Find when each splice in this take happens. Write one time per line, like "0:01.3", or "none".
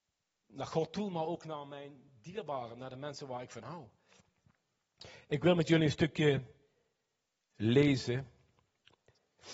none